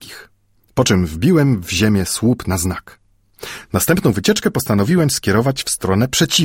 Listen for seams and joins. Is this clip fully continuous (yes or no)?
yes